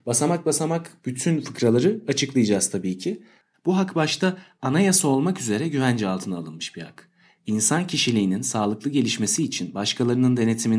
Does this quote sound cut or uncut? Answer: cut